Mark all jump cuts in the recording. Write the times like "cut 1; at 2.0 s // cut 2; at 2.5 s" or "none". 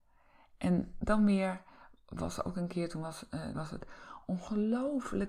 cut 1; at 3.5 s